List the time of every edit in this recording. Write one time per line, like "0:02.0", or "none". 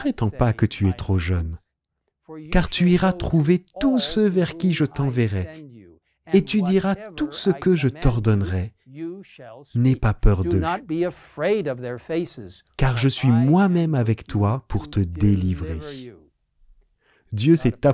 none